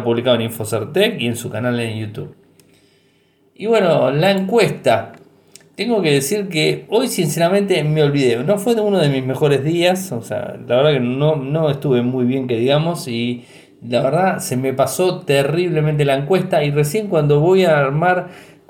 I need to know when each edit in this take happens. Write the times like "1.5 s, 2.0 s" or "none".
none